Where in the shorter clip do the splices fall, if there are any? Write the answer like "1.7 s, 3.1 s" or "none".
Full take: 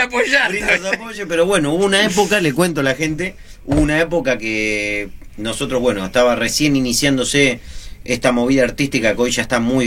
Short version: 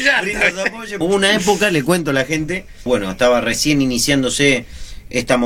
1.0 s, 2.9 s